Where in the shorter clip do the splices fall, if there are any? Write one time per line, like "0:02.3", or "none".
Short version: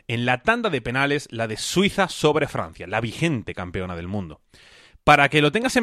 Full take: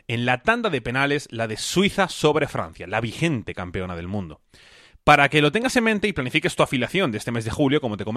none

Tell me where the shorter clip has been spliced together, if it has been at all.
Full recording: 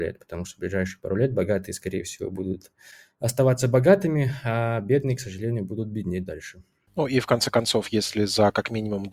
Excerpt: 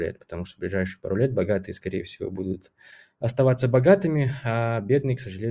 none

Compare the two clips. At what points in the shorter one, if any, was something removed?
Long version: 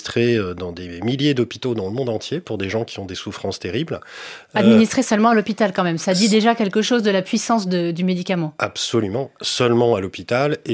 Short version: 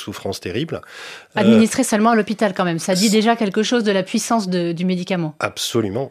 none

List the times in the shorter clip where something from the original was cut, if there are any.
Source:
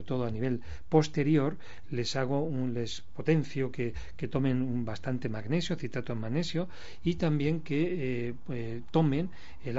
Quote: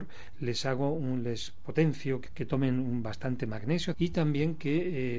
0:02.3
0:03.9

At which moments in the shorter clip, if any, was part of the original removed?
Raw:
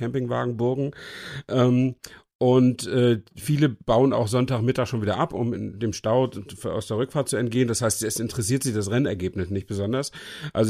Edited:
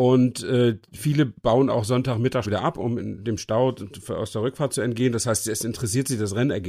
0:02.4

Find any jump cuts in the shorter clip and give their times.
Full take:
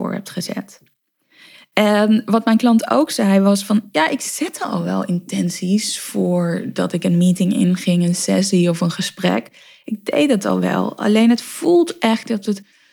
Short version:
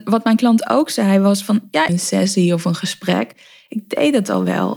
0:01.9

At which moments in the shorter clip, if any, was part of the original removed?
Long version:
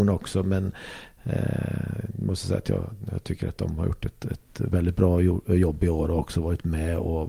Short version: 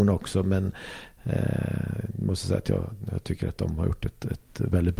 none

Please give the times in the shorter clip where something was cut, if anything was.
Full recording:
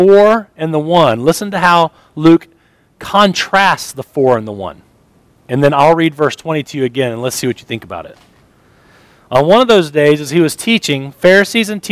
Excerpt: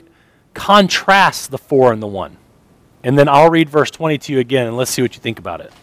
none

